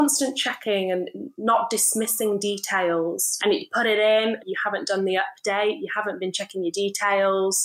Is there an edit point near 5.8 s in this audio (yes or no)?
no